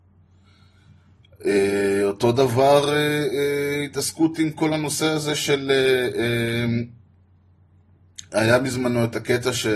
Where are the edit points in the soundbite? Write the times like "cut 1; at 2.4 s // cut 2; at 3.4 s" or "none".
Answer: none